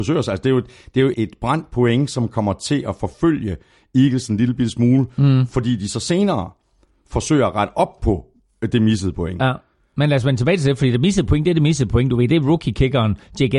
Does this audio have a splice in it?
yes; 1 cut; at 1.1 s

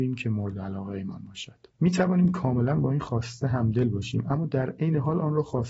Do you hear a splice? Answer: yes; 1 cut; at 1.7 s

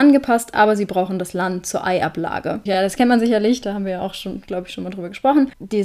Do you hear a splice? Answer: no; 0 cuts

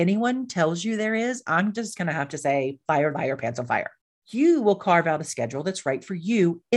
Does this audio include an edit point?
no; 0 cuts

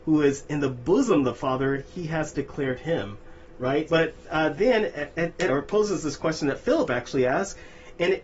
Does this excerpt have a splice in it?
yes; 2 cuts; at 3.9 s, 5.5 s

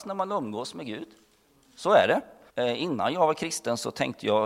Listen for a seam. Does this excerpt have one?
yes; 1 cut; at 2.5 s

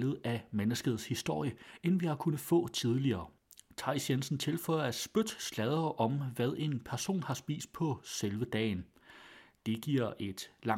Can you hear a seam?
no; 0 cuts

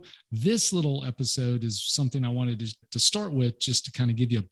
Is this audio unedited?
no; 1 cut; at 2.8 s

